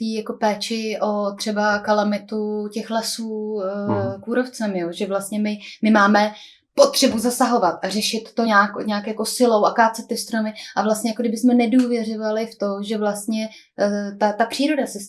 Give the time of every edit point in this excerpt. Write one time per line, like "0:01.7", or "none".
none